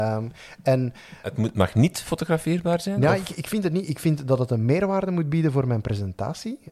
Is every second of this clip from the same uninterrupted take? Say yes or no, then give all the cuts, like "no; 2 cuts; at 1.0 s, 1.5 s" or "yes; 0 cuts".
yes; 0 cuts